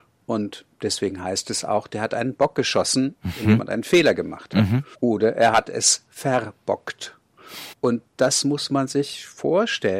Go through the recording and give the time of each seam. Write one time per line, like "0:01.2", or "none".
0:04.9
0:07.7